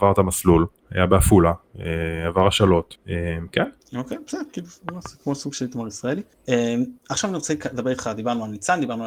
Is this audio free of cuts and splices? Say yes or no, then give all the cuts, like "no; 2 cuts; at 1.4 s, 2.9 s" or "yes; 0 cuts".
yes; 0 cuts